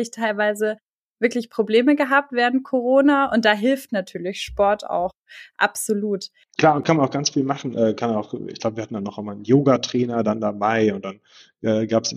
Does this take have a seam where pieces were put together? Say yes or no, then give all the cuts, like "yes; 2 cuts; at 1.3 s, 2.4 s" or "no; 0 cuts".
no; 0 cuts